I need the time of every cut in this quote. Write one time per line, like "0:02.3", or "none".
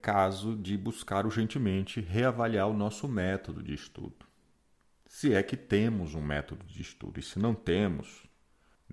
none